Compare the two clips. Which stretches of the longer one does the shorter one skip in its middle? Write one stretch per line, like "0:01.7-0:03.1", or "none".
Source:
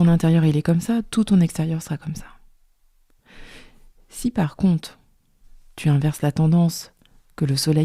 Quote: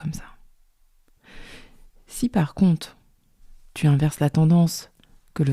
none